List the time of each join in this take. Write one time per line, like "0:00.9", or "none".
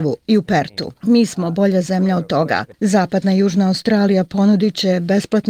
0:02.7